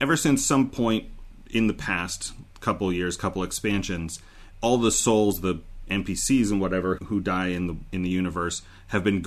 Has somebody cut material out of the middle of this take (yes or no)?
yes